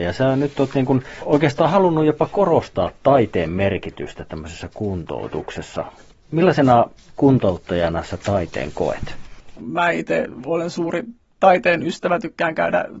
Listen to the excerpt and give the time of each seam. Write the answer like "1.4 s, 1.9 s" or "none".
9.6 s